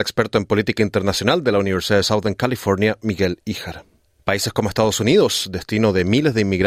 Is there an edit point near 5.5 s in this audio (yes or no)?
no